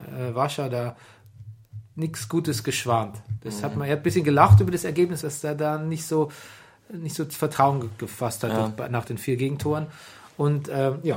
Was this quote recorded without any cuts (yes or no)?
no